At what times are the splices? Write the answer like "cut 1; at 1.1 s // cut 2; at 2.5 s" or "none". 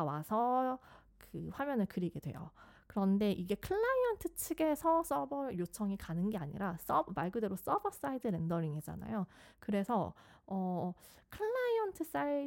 cut 1; at 9.5 s